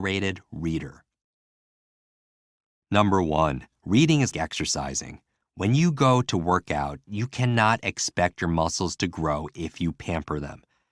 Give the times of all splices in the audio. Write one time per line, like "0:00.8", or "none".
0:04.3